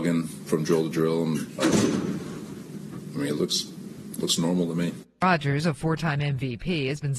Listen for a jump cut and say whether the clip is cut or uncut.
cut